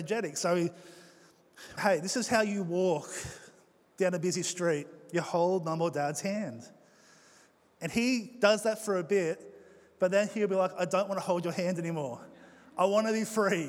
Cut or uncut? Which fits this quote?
cut